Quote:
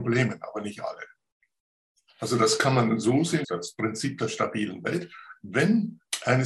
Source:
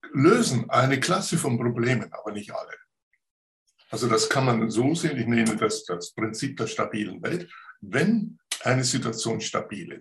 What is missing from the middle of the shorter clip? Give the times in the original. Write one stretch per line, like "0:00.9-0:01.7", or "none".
0:05.1-0:05.8